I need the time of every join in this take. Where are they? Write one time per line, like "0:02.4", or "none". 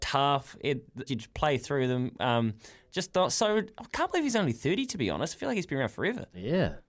0:01.1